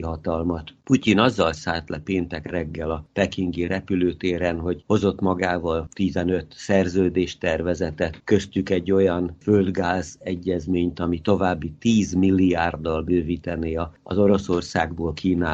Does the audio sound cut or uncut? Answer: uncut